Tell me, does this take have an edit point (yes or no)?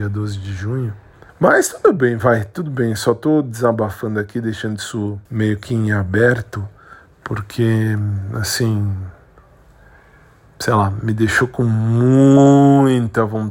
yes